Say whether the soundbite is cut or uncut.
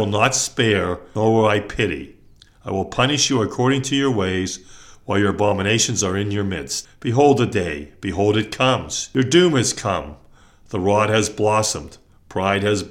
cut